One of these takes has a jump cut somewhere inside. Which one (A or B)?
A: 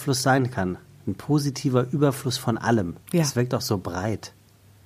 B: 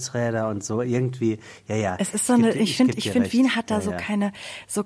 A